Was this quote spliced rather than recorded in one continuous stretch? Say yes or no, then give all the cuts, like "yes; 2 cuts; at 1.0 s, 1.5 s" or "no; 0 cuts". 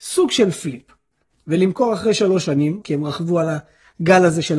yes; 1 cut; at 2.8 s